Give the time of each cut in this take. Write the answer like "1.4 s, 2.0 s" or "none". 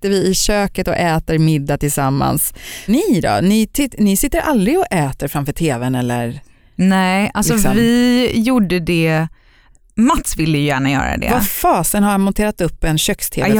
none